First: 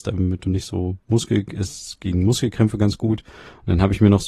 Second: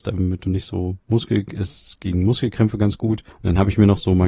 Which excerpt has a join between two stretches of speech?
second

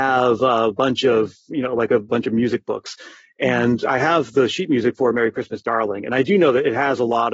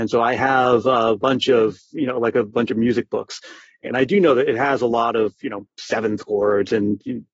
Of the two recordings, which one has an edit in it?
second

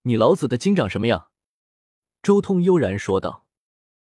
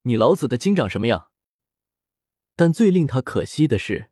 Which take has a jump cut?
second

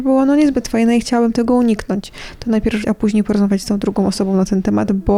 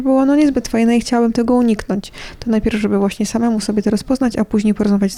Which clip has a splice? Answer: first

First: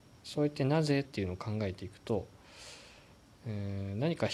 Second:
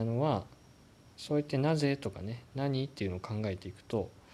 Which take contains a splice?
first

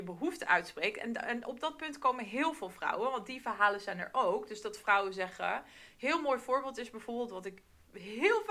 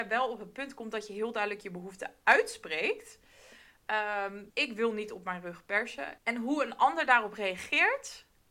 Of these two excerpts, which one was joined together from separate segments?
second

